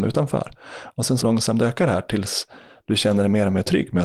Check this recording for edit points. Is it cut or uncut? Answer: cut